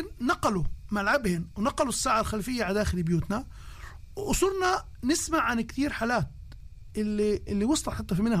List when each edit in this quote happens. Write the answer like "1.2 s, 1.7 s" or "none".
7.5 s

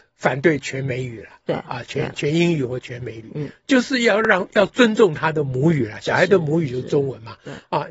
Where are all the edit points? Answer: none

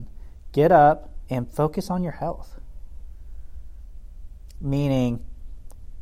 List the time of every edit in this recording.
1.3 s, 4.5 s

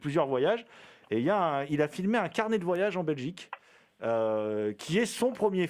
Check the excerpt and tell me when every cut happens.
none

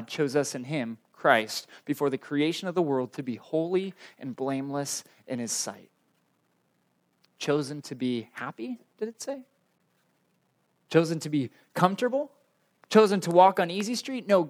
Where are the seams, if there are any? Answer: none

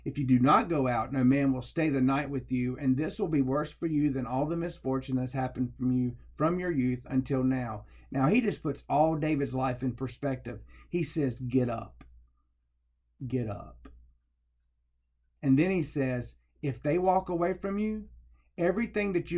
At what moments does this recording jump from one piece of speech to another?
15.4 s

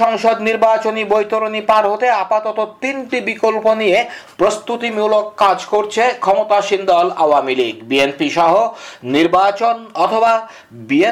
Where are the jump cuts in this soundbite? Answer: none

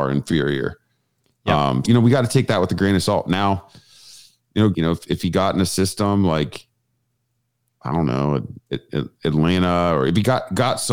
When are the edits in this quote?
1.8 s, 4.7 s

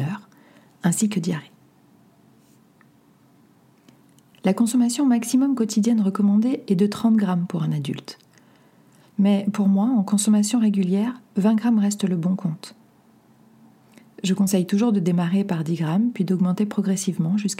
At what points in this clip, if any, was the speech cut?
none

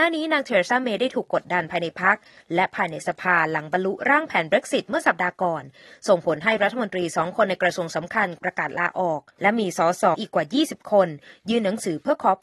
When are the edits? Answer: 10.1 s

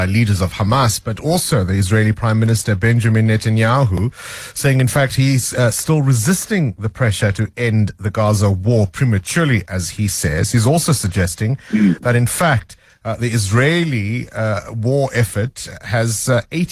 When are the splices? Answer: none

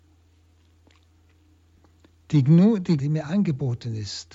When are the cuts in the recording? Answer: 3.0 s

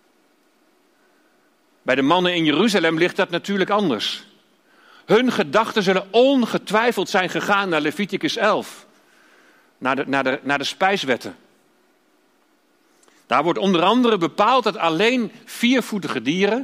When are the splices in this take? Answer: none

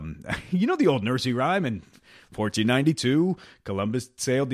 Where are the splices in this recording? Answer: none

